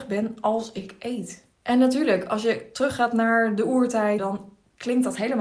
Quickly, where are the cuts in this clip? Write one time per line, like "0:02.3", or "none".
0:01.5
0:04.2